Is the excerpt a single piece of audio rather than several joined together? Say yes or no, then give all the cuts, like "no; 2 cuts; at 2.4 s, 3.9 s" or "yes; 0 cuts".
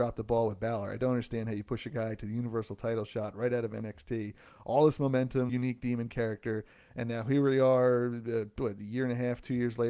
no; 1 cut; at 5.5 s